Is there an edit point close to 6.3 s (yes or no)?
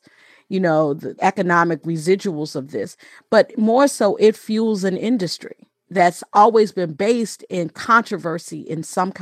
no